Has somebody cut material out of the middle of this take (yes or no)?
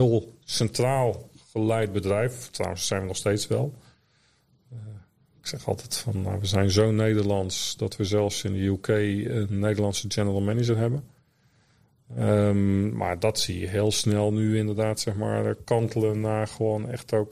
no